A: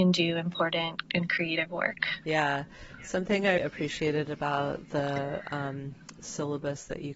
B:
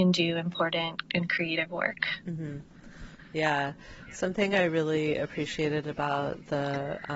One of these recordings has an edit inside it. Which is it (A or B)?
A